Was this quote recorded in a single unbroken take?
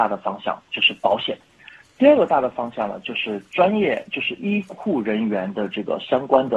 yes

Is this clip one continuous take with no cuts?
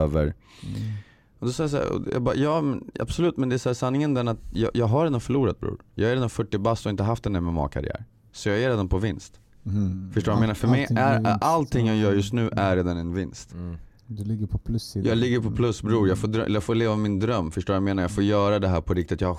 yes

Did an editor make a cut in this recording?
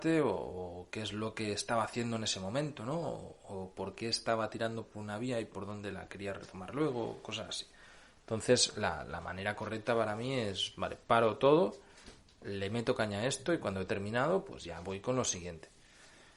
no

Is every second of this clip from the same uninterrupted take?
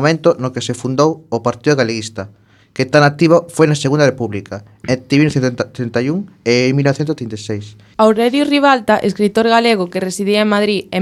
no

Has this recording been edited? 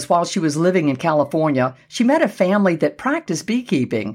no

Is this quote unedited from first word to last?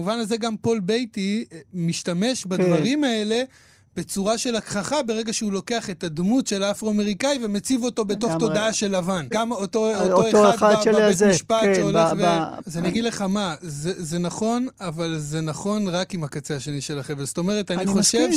no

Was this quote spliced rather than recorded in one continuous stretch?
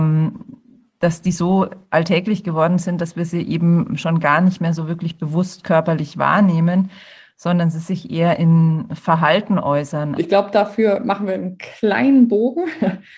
yes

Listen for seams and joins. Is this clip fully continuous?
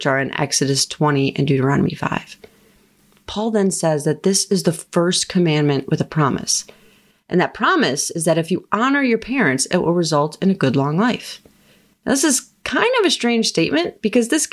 yes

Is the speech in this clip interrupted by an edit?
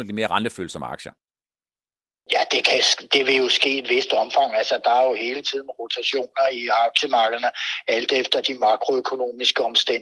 no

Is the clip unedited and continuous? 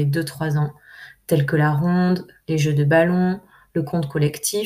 yes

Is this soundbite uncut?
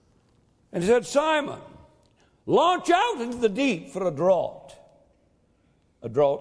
yes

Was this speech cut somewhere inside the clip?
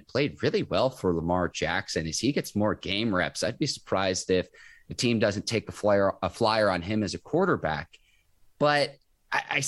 no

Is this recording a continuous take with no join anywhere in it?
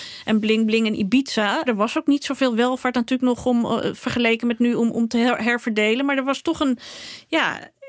no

